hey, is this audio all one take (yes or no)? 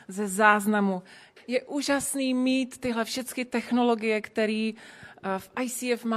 no